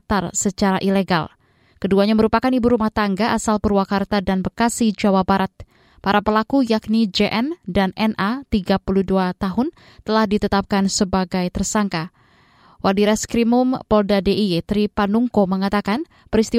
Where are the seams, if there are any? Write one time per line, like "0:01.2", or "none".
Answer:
none